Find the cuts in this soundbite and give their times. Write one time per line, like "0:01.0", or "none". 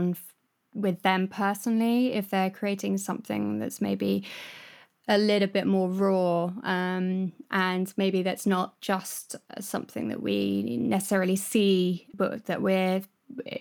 0:12.1

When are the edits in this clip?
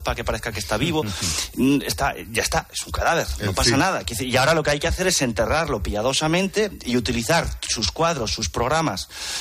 none

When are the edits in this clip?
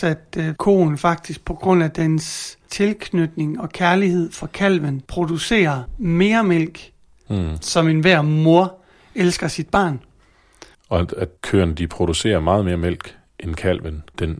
0:07.3
0:10.7

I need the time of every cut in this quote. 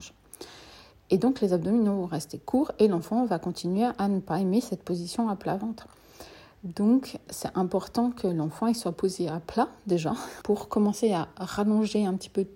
0:07.3
0:10.4

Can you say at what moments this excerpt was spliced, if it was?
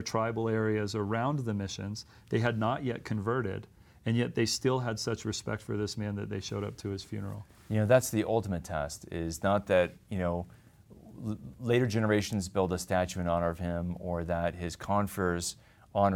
none

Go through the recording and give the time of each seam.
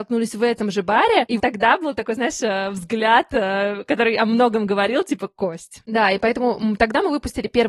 0:01.4
0:05.8

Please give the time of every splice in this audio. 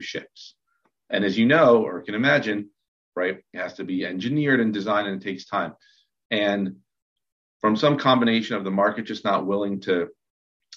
0:03.1

